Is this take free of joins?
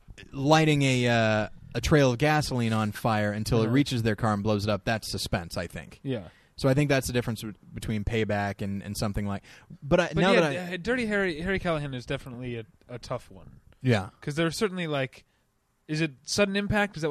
yes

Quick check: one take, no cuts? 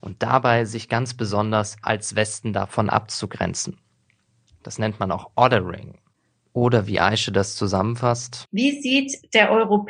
yes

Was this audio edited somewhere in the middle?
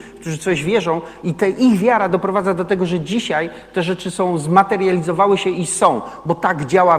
no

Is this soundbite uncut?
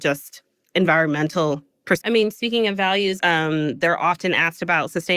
no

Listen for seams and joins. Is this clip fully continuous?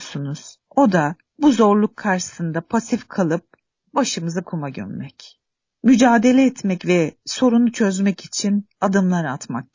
yes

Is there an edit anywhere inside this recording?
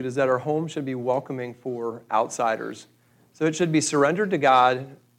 no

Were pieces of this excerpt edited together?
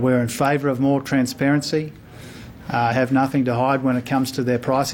yes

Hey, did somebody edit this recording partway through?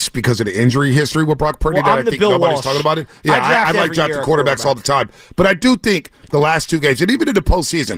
no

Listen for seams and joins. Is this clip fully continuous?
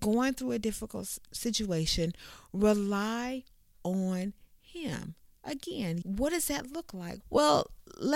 no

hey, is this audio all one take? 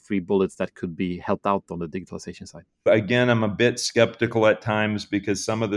no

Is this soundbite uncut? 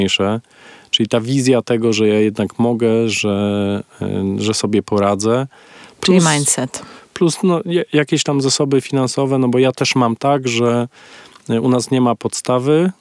yes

